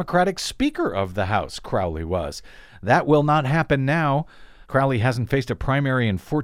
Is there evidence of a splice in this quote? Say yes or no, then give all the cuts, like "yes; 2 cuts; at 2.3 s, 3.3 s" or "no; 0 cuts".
yes; 1 cut; at 4.6 s